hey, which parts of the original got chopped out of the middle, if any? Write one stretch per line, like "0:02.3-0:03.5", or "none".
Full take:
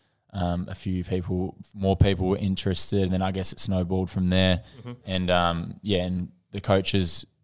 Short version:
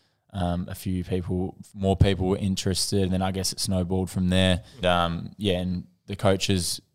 0:04.8-0:05.3